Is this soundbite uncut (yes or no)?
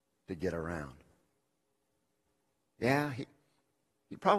yes